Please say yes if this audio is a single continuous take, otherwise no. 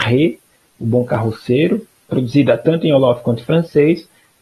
yes